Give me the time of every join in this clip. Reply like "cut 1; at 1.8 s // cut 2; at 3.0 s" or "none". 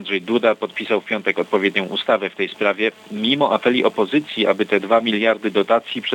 none